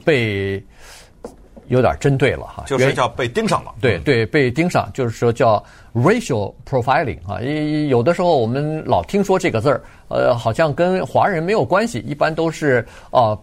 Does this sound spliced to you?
no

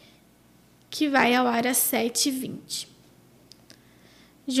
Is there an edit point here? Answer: no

